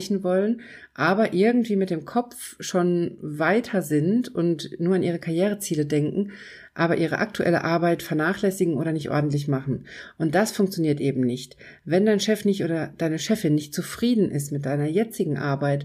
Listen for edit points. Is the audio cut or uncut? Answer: uncut